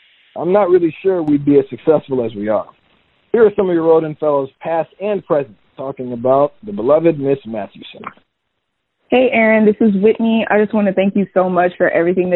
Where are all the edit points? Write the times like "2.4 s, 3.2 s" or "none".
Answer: none